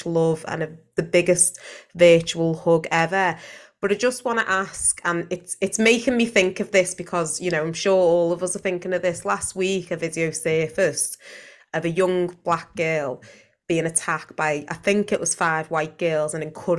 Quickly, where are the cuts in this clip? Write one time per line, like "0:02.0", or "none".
none

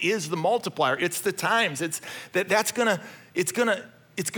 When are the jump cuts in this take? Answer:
none

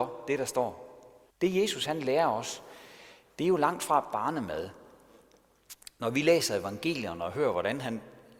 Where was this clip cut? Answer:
0:01.3

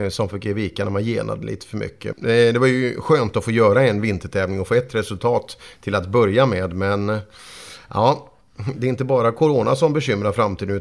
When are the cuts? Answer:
0:02.1

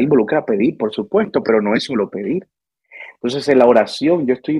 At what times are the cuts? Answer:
none

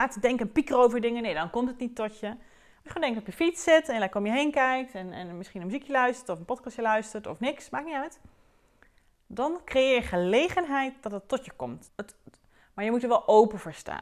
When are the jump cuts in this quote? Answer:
0:11.9

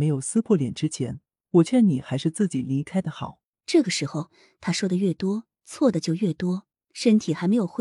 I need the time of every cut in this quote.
0:03.5
0:06.7

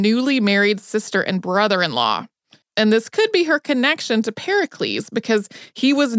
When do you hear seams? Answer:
0:02.6

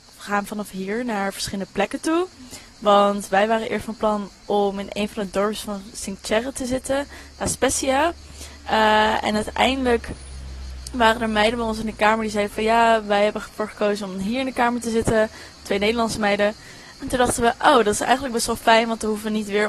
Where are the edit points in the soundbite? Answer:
0:17.0

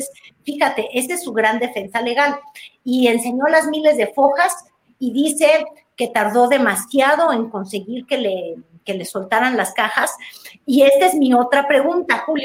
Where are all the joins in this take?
none

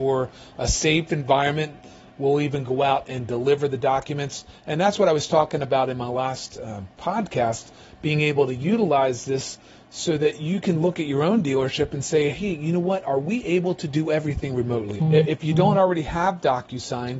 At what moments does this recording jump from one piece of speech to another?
0:15.0

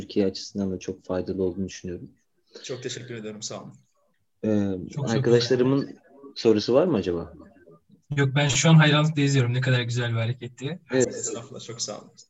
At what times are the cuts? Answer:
0:11.0

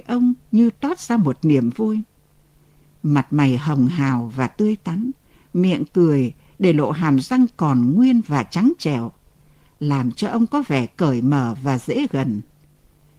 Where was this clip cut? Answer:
none

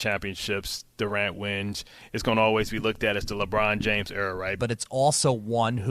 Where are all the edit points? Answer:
0:04.6

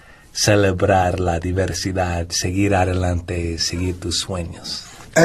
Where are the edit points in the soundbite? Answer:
none

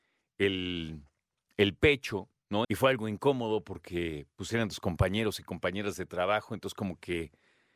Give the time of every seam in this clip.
0:02.6

